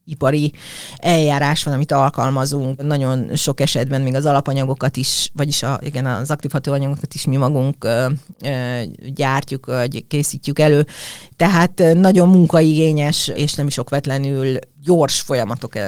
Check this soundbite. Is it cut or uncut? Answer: uncut